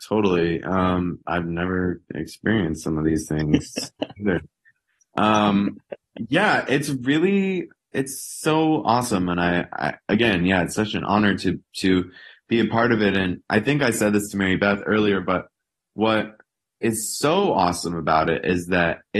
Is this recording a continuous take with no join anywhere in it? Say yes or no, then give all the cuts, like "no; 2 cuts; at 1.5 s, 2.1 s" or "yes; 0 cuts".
yes; 0 cuts